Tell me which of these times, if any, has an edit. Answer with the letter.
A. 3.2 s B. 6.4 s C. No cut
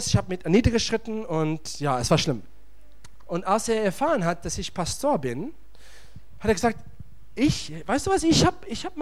A